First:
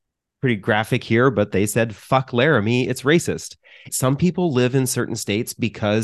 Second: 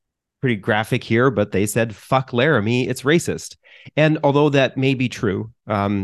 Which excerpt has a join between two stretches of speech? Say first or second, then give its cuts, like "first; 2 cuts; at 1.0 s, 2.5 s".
first; 1 cut; at 3.9 s